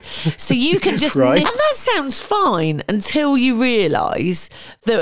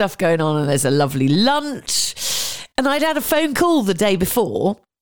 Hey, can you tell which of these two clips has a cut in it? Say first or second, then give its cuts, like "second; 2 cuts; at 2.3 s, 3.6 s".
first; 1 cut; at 1.4 s